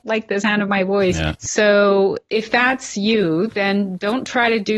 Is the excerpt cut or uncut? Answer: uncut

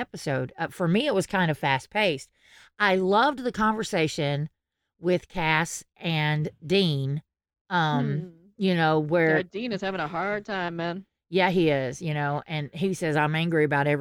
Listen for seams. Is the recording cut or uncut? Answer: uncut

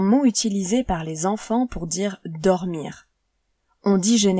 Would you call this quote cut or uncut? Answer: uncut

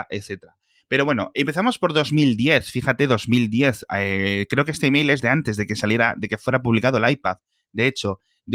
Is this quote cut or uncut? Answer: uncut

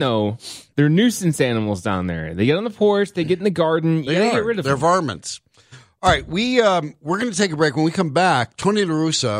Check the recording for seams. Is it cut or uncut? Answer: uncut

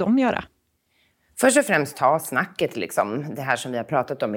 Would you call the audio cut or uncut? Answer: uncut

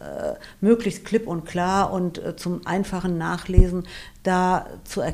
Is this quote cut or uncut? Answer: uncut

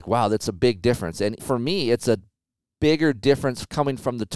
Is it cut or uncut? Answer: cut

